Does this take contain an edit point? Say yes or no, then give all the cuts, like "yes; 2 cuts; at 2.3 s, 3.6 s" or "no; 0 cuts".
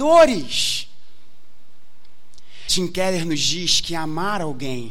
yes; 1 cut; at 2.7 s